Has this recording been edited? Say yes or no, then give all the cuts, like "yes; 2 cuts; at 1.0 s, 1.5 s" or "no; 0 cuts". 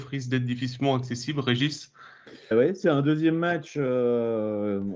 yes; 1 cut; at 2.5 s